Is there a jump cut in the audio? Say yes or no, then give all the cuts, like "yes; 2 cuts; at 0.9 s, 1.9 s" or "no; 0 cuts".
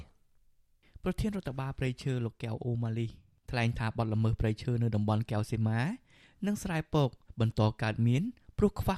no; 0 cuts